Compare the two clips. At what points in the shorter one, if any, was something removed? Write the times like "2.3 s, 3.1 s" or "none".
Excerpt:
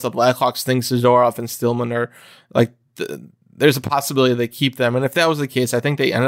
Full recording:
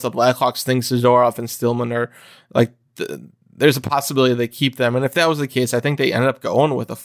none